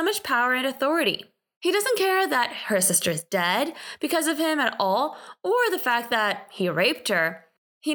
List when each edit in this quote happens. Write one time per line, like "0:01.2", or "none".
0:01.5